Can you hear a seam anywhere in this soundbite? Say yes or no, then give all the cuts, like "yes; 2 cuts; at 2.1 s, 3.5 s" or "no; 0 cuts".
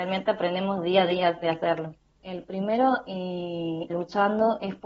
yes; 2 cuts; at 2.2 s, 3.9 s